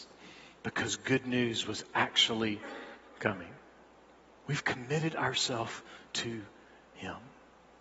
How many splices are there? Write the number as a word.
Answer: one